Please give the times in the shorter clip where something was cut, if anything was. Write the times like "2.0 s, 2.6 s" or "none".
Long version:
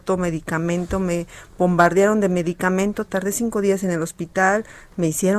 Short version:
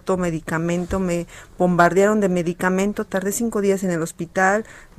none